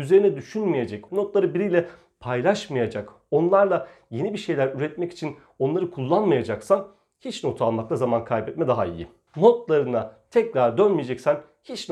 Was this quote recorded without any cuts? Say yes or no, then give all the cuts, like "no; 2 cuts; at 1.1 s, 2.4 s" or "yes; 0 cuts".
no; 2 cuts; at 1.1 s, 9.3 s